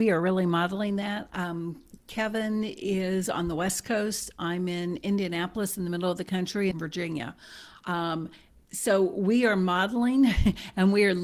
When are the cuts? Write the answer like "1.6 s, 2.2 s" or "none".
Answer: 6.7 s